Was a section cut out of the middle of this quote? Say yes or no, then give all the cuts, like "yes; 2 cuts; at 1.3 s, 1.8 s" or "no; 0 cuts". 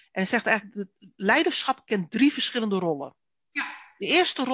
no; 0 cuts